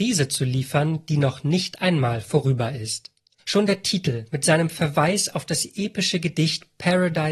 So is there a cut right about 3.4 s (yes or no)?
yes